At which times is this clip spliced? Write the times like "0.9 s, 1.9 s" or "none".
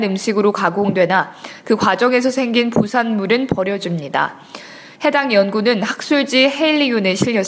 4.9 s